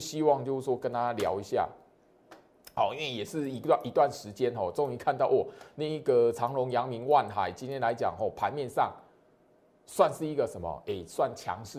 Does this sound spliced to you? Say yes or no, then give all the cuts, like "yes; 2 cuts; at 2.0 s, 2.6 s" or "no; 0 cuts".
no; 0 cuts